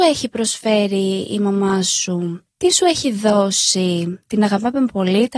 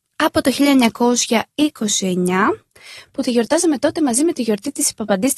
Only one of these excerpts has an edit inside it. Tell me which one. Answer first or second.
first